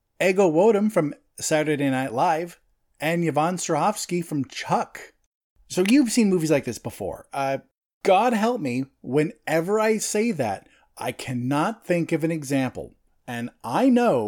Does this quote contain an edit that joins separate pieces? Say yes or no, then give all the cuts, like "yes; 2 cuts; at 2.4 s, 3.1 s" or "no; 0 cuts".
no; 0 cuts